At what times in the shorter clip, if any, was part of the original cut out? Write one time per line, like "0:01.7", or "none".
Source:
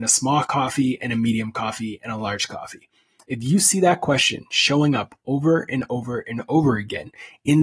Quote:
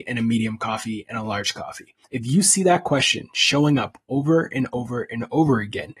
0:02.0